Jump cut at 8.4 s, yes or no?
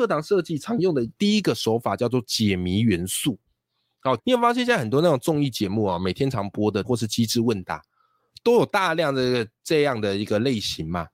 no